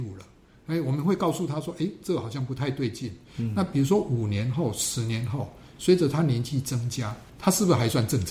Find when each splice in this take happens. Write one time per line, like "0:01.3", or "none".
0:03.3